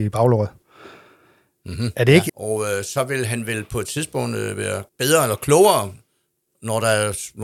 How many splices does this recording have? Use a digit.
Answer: 2